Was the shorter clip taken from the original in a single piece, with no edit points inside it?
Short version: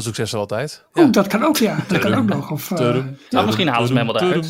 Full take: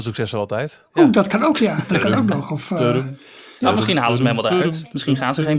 no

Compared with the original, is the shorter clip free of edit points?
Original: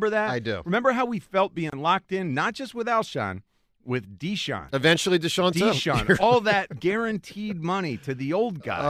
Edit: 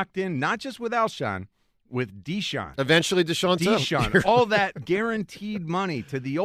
yes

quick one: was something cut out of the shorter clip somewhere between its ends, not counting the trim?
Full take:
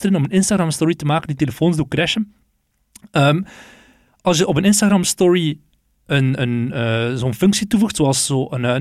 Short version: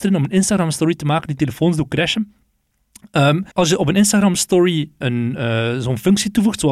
yes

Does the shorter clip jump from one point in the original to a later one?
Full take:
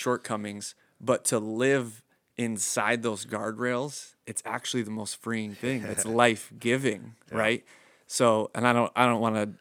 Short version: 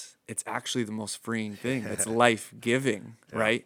no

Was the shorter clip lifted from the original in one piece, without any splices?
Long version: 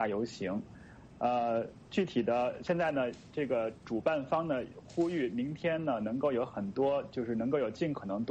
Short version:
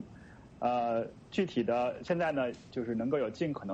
no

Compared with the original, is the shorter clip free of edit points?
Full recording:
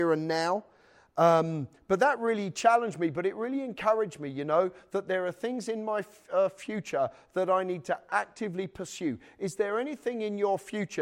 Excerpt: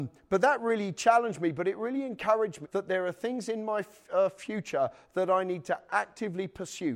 no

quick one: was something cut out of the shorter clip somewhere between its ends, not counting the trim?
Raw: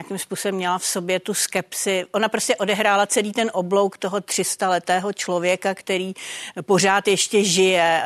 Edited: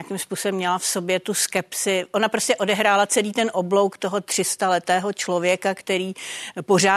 no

